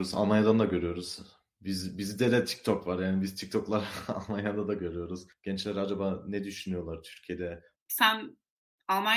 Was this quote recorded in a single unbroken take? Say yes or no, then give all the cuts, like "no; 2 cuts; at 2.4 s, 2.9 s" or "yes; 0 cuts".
no; 2 cuts; at 5.3 s, 7.7 s